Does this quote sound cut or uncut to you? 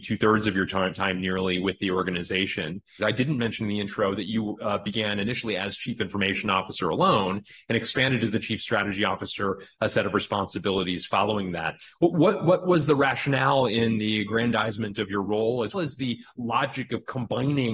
cut